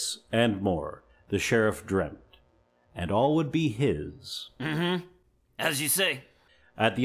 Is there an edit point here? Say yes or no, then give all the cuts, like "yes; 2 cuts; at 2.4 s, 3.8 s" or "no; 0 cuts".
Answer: no; 0 cuts